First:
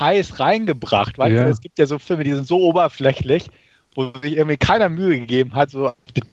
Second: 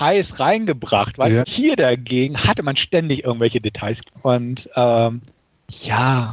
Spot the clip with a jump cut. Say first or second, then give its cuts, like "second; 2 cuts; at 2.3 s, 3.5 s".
second; 2 cuts; at 1.4 s, 4.2 s